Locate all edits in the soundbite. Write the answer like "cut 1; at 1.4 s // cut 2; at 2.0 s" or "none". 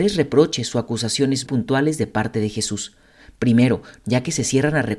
cut 1; at 1.4 s // cut 2; at 4.0 s